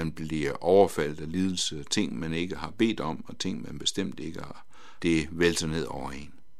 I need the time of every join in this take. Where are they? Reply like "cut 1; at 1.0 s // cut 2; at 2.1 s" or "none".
cut 1; at 5.0 s